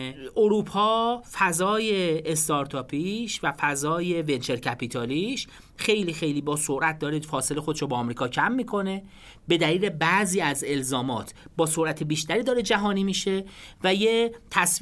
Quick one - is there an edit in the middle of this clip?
no; 0 cuts

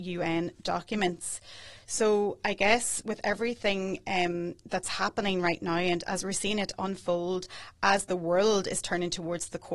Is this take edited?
no; 0 cuts

